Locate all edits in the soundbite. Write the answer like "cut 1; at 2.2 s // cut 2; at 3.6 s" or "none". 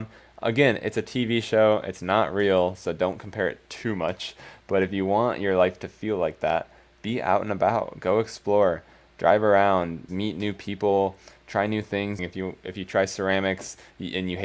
cut 1; at 10.1 s // cut 2; at 12.2 s